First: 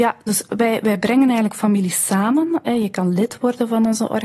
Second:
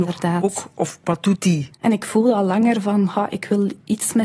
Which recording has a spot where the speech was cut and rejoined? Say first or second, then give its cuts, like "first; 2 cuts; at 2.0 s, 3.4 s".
second; 1 cut; at 1.7 s